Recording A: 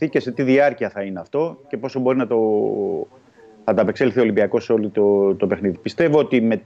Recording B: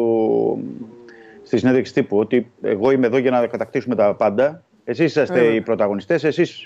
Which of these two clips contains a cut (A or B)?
B